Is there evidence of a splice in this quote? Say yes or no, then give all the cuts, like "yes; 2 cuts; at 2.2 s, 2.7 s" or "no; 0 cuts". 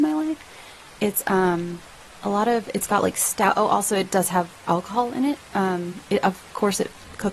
no; 0 cuts